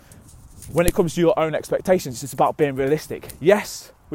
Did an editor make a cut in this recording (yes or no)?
no